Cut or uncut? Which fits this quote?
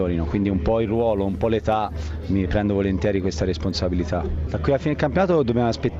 cut